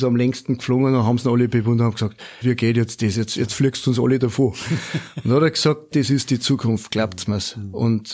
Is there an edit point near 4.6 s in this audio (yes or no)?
no